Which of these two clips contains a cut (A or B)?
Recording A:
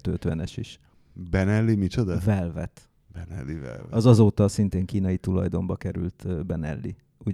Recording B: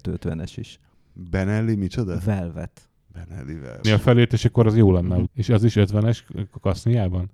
B